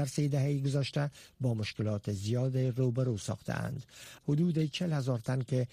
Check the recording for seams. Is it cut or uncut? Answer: cut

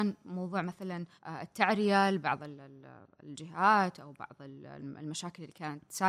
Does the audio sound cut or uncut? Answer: cut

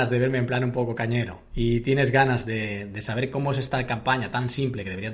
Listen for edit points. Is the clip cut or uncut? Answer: uncut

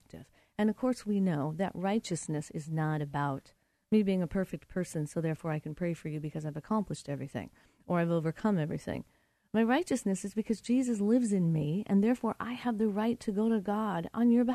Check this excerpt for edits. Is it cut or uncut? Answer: uncut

